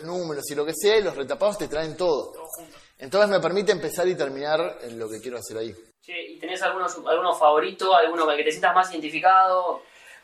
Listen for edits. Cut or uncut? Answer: uncut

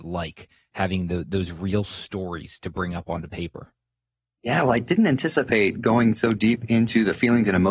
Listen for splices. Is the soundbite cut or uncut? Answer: uncut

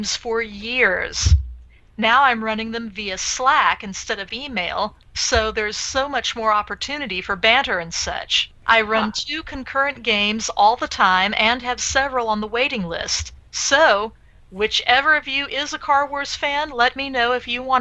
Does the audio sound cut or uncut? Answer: uncut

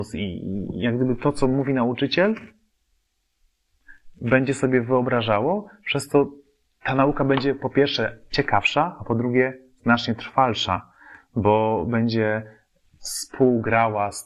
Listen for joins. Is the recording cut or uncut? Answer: uncut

